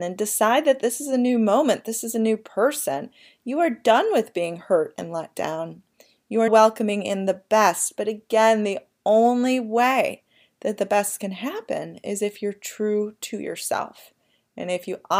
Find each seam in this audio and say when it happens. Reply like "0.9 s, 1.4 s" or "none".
6.5 s